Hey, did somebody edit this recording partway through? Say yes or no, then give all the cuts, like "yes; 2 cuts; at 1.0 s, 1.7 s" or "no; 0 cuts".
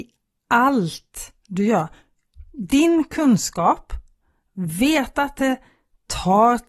no; 0 cuts